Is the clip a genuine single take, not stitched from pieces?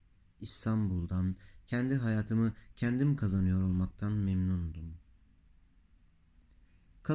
no; 1 cut; at 1.6 s

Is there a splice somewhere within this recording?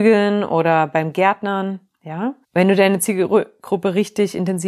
yes; 1 cut; at 2.4 s

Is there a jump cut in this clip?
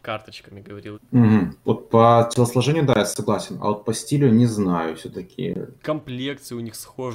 yes; 2 cuts; at 0.9 s, 5.8 s

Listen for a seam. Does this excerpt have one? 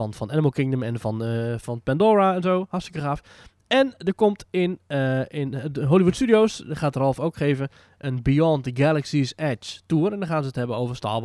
no; 0 cuts

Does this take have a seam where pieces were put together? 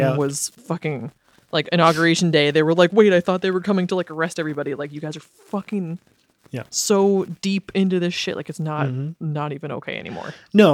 no; 0 cuts

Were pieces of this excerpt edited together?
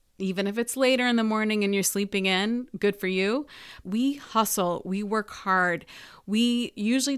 yes; 1 cut; at 3.8 s

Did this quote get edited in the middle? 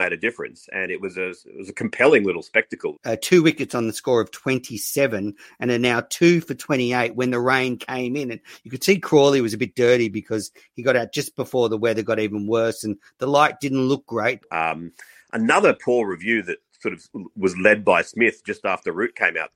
yes; 2 cuts; at 2.9 s, 14.4 s

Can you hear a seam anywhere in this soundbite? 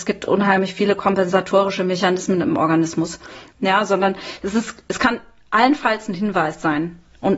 yes; 1 cut; at 3.5 s

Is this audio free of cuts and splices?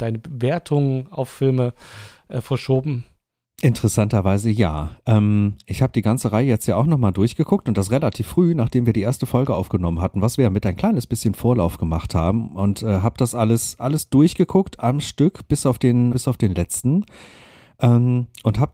no; 1 cut; at 16.1 s

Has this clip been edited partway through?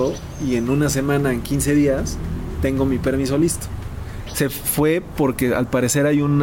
yes; 1 cut; at 4.3 s

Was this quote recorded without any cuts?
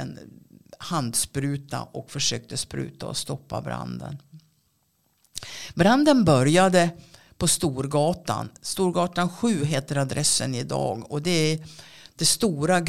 yes; 0 cuts

